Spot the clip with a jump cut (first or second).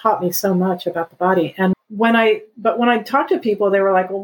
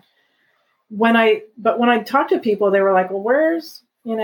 first